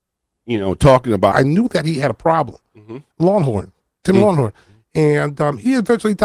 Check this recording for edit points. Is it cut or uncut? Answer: cut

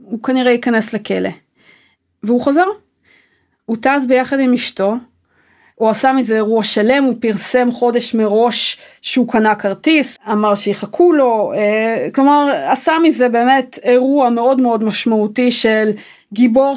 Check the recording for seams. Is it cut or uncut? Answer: cut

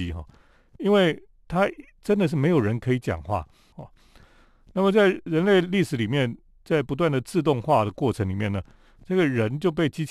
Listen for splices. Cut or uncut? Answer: cut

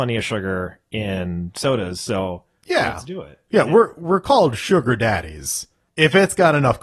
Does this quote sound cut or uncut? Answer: uncut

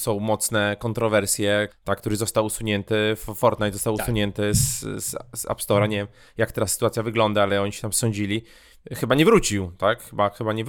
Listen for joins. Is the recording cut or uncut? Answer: cut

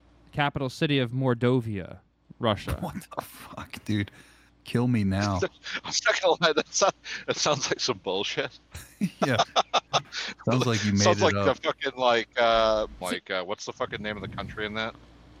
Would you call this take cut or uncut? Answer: cut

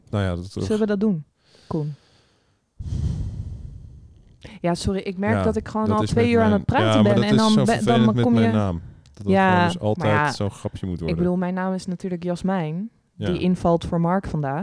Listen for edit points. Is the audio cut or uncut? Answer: uncut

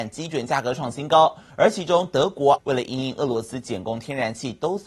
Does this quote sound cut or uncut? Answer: cut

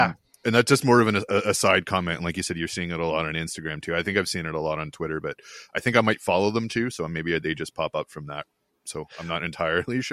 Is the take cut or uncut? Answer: uncut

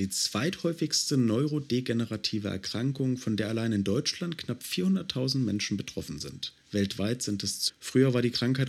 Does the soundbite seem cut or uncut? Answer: cut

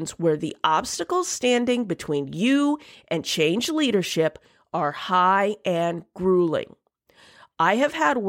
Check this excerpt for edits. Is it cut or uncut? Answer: uncut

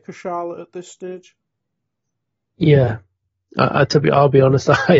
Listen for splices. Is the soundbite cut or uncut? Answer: uncut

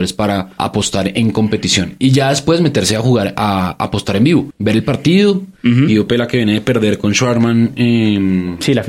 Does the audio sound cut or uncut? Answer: cut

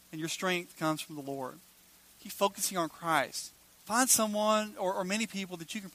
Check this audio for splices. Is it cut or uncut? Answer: cut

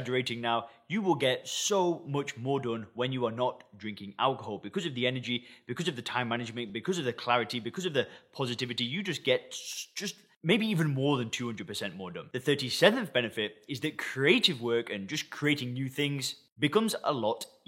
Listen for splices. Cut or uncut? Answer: uncut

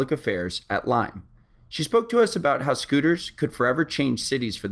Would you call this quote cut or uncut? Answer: uncut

